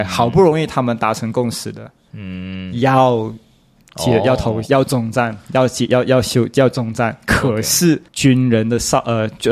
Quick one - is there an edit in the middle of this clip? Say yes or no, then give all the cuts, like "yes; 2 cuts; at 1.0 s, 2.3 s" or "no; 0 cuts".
yes; 1 cut; at 8.1 s